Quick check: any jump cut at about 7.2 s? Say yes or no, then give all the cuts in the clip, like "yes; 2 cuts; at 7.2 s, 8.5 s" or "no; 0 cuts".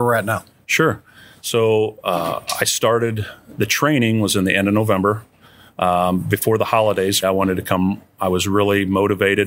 yes; 1 cut; at 7.2 s